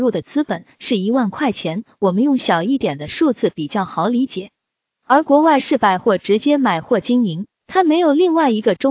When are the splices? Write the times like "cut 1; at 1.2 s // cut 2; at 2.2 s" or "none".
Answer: cut 1; at 4.9 s // cut 2; at 7.5 s